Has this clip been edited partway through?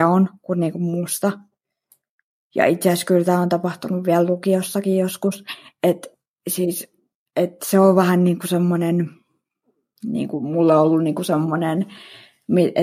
no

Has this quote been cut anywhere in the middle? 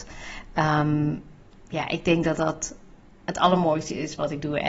no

